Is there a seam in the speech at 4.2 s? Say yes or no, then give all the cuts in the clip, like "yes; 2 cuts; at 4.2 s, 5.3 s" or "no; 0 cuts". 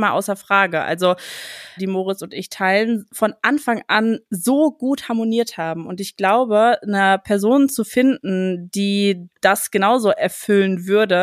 no; 1 cut; at 1.8 s